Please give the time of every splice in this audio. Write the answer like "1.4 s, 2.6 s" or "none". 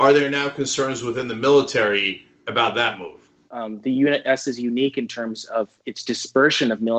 3.5 s, 5.8 s